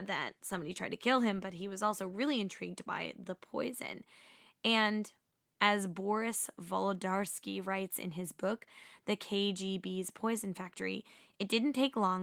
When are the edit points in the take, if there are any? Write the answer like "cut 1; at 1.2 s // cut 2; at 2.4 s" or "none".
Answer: none